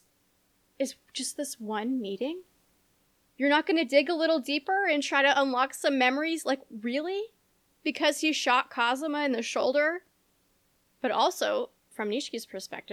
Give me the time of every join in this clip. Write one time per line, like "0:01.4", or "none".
none